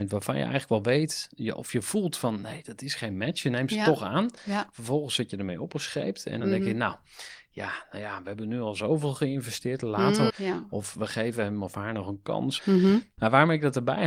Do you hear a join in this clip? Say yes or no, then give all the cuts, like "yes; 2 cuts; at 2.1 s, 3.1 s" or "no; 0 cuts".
yes; 3 cuts; at 6.4 s, 10.3 s, 12.6 s